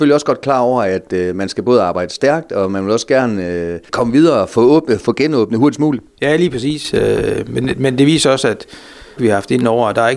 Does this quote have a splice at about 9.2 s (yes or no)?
yes